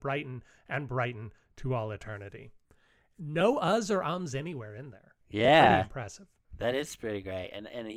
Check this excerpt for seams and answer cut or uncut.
uncut